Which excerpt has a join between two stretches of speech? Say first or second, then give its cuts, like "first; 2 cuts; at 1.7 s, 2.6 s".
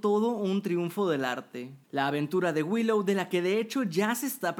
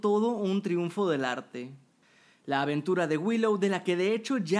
first; 1 cut; at 1.8 s